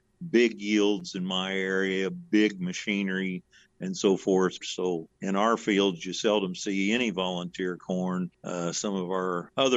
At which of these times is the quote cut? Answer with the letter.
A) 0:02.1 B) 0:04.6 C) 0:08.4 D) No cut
B